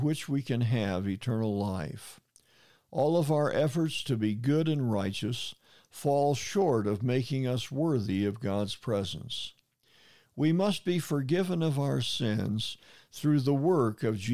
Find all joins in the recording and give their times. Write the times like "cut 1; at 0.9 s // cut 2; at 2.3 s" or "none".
none